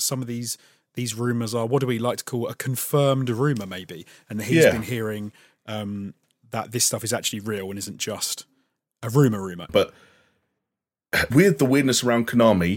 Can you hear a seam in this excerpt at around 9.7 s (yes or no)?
yes